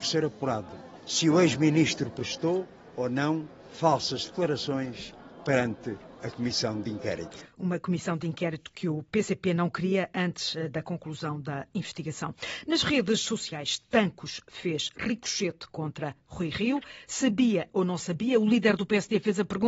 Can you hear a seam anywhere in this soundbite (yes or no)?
no